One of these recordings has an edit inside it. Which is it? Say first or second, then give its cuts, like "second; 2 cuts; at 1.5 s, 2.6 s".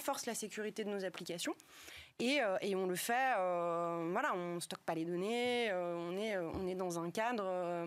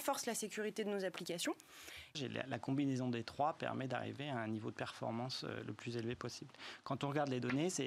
second; 1 cut; at 2.1 s